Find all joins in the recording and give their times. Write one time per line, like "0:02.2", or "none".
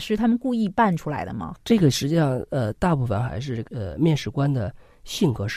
none